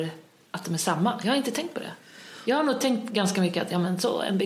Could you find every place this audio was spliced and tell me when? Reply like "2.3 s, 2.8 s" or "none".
none